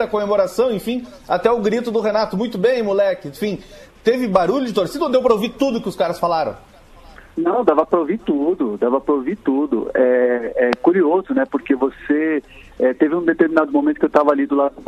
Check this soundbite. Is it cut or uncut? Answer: uncut